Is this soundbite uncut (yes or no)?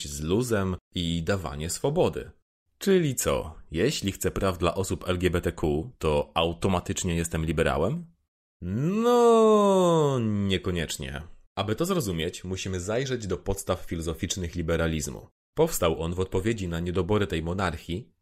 no